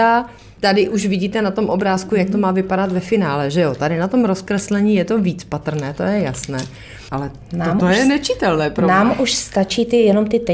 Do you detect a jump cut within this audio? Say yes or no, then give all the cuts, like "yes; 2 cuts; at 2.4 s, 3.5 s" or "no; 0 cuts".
no; 0 cuts